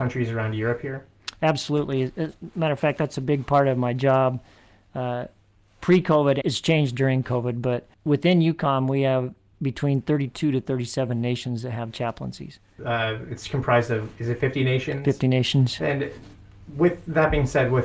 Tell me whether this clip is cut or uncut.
cut